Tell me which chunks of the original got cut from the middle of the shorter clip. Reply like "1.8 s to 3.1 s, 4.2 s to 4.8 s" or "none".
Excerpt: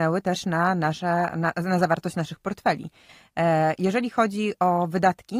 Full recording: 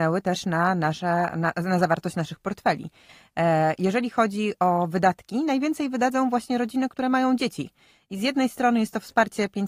none